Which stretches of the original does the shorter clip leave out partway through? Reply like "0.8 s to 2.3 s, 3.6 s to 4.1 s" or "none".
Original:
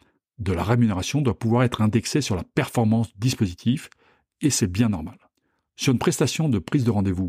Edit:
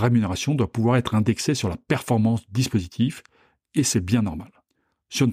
none